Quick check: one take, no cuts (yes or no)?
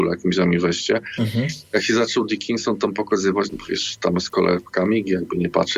no